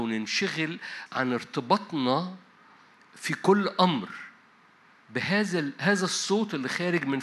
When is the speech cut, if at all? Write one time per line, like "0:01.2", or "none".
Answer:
0:01.1